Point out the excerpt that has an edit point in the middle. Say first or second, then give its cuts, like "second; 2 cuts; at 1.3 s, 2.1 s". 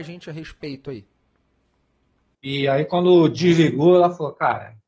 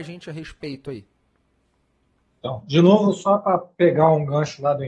first; 1 cut; at 2.3 s